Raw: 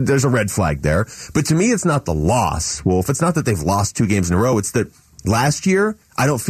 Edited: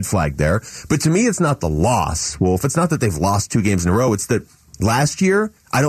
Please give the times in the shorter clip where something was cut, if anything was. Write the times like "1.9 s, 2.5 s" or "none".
none